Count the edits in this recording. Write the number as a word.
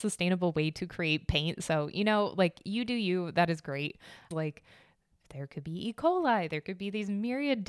one